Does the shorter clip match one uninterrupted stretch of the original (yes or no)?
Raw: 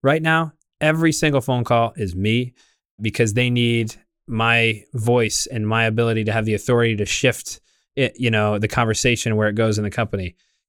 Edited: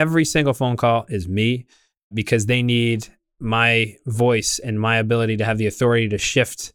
yes